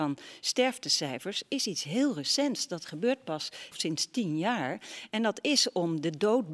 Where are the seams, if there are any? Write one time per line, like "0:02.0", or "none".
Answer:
0:03.7